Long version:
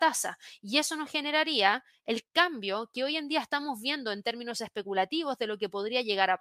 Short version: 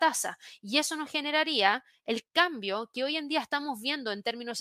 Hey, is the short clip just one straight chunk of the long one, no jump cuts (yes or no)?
yes